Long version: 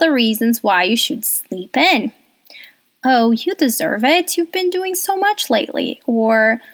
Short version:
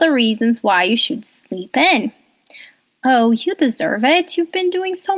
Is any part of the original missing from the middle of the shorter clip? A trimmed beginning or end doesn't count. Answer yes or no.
no